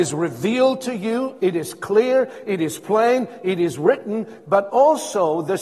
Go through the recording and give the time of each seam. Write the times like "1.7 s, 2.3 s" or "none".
none